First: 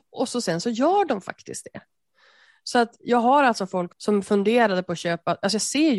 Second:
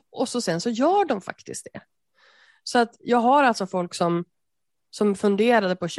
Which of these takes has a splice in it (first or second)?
first